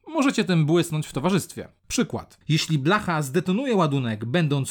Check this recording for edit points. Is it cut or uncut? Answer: cut